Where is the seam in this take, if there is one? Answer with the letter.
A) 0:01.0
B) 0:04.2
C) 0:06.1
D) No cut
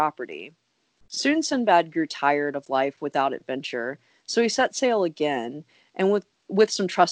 D